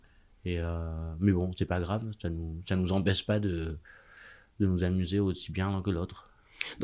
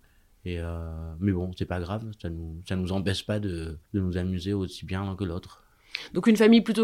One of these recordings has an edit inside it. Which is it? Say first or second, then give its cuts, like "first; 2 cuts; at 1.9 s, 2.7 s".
second; 1 cut; at 3.8 s